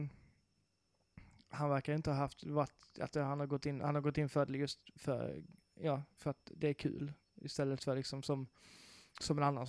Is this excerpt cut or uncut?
uncut